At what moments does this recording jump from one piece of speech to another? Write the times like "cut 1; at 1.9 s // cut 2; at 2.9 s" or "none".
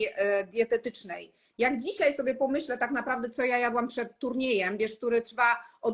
cut 1; at 1.5 s